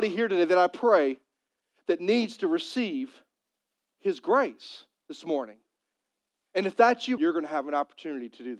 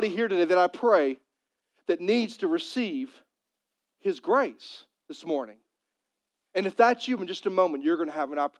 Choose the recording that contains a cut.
first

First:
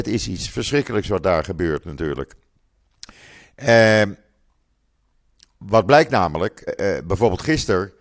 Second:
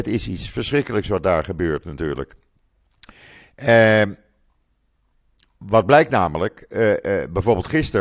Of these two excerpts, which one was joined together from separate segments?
first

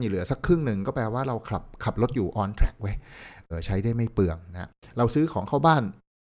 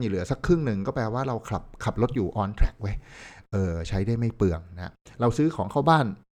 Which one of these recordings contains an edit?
first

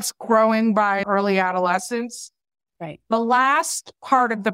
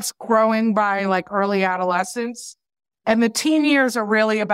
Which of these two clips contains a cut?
first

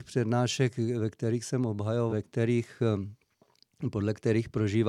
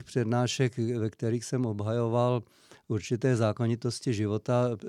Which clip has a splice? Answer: first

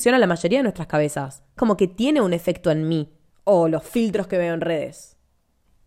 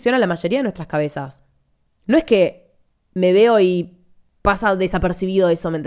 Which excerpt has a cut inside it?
first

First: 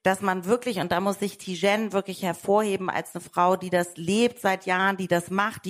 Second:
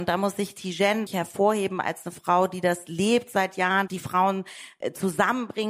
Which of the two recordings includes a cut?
second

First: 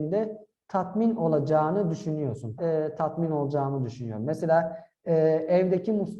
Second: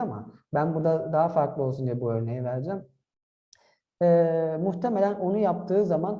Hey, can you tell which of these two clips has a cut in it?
first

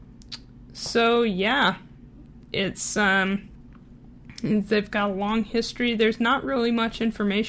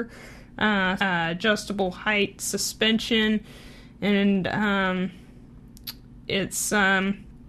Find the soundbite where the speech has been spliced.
second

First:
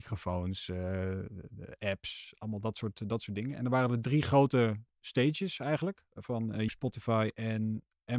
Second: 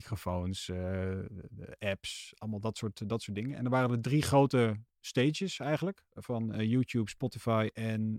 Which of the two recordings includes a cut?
first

